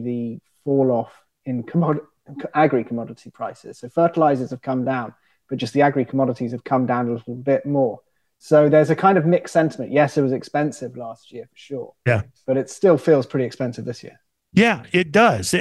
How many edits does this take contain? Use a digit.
0